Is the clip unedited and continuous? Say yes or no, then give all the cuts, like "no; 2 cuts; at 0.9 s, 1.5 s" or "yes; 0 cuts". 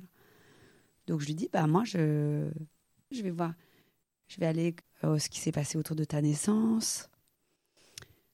no; 2 cuts; at 3.1 s, 4.8 s